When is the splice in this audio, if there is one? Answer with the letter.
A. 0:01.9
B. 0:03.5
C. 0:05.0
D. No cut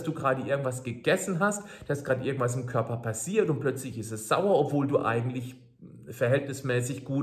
D